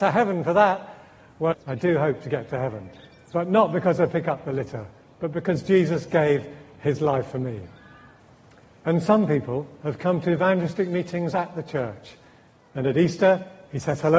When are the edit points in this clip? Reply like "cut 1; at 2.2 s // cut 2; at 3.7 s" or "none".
cut 1; at 1.5 s